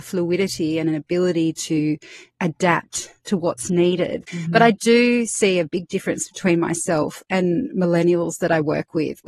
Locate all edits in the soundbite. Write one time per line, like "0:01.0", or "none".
0:04.3